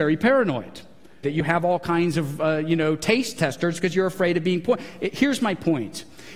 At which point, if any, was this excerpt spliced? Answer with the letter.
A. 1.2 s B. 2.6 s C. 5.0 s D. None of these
A